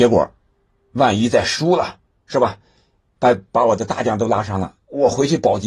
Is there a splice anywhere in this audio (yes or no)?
yes